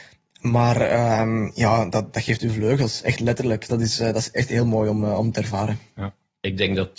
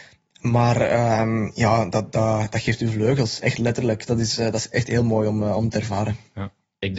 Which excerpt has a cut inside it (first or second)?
first